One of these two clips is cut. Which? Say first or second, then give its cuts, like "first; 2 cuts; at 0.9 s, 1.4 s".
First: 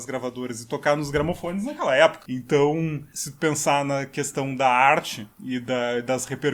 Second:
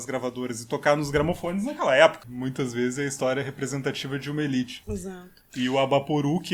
second; 2 cuts; at 2.2 s, 4.8 s